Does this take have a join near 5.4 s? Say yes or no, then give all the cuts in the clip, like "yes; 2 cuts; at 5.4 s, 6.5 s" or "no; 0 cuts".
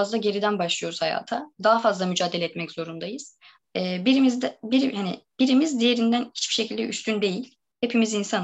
no; 2 cuts; at 1.5 s, 3.6 s